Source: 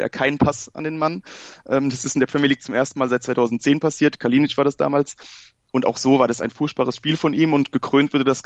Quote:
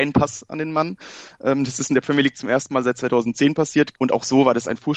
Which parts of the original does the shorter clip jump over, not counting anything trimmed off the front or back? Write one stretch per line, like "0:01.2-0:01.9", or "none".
0:04.2-0:05.7